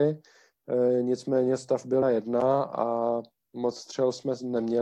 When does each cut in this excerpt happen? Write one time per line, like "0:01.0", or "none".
0:02.0